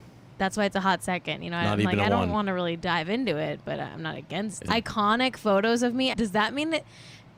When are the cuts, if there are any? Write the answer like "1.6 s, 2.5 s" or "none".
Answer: 4.7 s, 6.1 s